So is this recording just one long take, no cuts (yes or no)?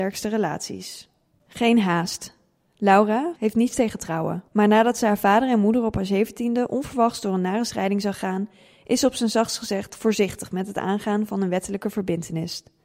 no